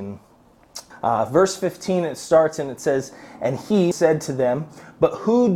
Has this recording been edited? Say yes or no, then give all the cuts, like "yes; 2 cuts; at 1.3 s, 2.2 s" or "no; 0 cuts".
yes; 2 cuts; at 0.9 s, 3.9 s